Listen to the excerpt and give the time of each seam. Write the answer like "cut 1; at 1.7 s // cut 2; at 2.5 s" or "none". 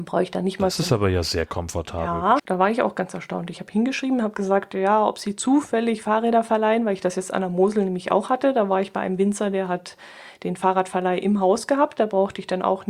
cut 1; at 2.4 s